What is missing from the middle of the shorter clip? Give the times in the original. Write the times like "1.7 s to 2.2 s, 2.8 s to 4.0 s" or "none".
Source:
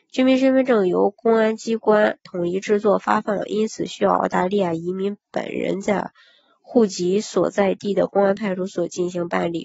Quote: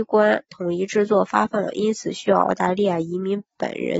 none